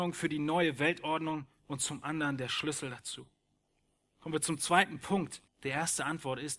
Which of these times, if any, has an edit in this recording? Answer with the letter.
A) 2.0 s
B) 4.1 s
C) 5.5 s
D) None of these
C